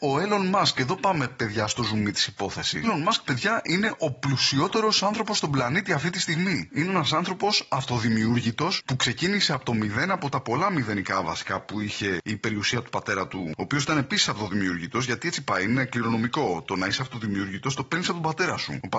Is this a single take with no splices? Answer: no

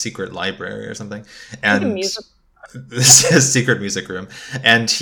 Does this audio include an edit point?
no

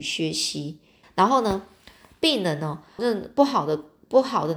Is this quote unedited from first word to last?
no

